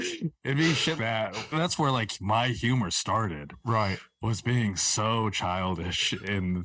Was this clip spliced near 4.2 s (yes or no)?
no